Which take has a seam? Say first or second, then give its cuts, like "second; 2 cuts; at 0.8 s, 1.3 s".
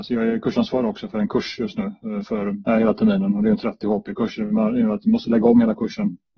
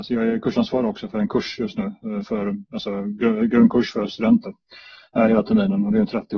first; 1 cut; at 2.7 s